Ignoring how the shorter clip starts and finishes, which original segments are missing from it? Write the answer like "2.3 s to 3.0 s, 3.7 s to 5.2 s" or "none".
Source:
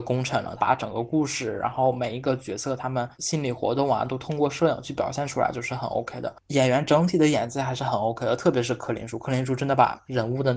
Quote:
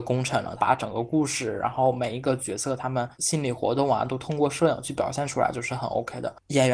none